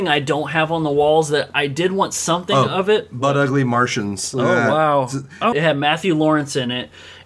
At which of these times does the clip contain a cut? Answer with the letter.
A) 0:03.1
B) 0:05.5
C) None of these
B